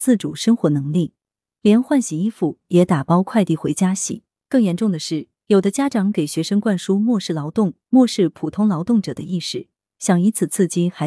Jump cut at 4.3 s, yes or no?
no